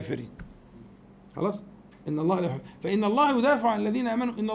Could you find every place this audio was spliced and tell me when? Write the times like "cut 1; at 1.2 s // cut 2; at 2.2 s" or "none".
none